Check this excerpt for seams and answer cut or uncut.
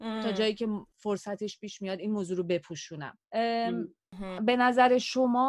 cut